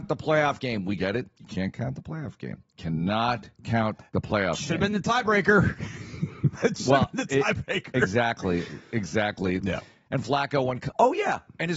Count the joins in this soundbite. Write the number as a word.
one